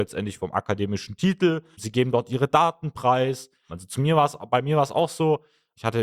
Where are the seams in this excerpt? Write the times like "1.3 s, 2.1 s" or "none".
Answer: 1.7 s, 3.7 s